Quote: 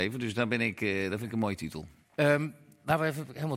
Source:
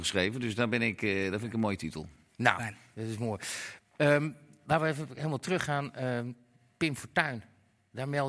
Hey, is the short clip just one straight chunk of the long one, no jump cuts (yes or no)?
no